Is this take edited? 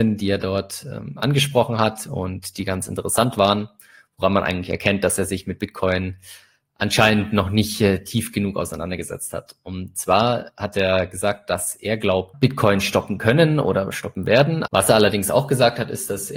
yes; 2 cuts; at 12.3 s, 14.7 s

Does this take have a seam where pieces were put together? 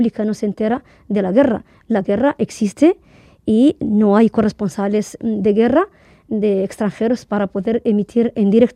yes; 1 cut; at 5.2 s

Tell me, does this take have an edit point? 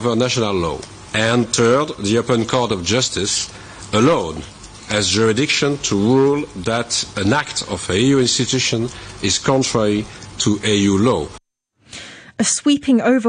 no; 0 cuts

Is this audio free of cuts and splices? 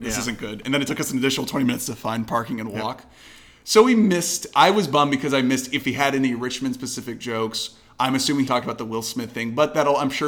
no; 1 cut; at 8.5 s

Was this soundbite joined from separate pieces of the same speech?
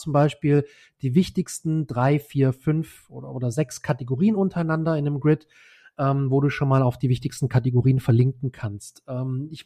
no; 0 cuts

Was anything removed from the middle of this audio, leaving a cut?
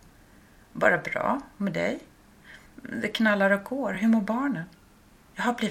no; 0 cuts

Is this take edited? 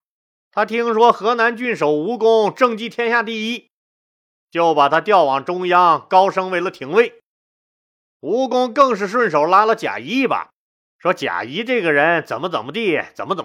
yes; 1 cut; at 10.8 s

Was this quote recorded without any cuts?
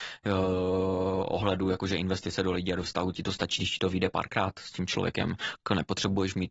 yes; 0 cuts

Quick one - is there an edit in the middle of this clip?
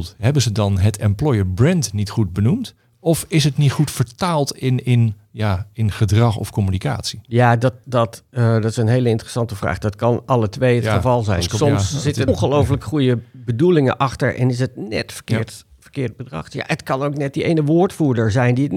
yes; 2 cuts; at 7.8 s, 12.3 s

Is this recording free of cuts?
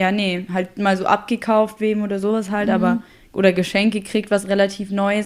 yes; 0 cuts

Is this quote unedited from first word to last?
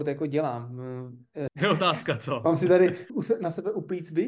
no; 2 cuts; at 1.5 s, 3.1 s

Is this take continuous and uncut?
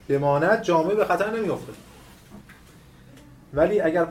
yes; 0 cuts

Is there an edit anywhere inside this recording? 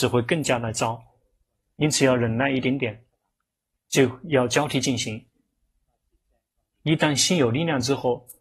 no; 0 cuts

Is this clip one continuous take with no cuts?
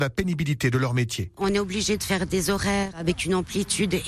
yes; 0 cuts

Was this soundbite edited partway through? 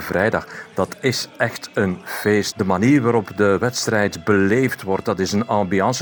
yes; 1 cut; at 2.5 s

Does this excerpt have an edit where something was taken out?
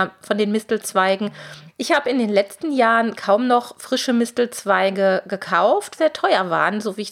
yes; 2 cuts; at 1.7 s, 6.0 s

